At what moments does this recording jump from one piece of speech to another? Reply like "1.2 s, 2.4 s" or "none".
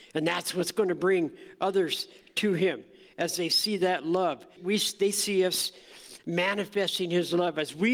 4.6 s

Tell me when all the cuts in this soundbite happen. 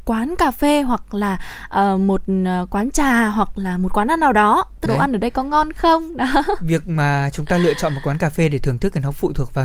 4.9 s

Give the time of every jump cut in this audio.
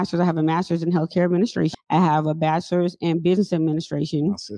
1.7 s

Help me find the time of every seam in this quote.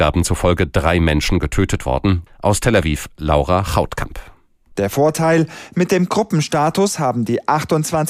2.3 s, 4.7 s

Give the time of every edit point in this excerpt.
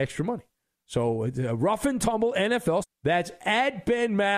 2.8 s

